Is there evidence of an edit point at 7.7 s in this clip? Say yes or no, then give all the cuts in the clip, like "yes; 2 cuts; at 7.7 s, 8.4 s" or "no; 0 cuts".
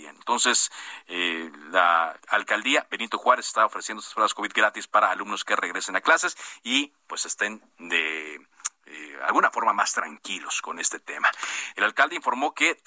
no; 2 cuts; at 2.2 s, 11.7 s